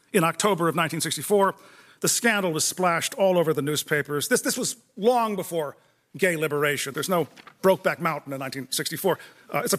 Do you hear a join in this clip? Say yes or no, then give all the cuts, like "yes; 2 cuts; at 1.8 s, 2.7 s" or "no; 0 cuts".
yes; 2 cuts; at 1.9 s, 6.9 s